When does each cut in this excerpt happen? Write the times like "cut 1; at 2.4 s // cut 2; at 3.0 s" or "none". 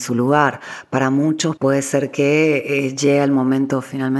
cut 1; at 1.6 s